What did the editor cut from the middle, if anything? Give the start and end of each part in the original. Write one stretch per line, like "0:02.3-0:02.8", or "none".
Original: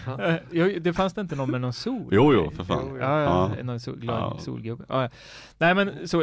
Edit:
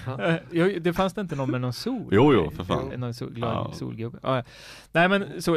0:02.9-0:03.6